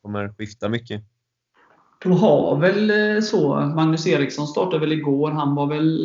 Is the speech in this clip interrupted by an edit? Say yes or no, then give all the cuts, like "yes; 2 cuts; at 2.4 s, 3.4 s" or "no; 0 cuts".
no; 0 cuts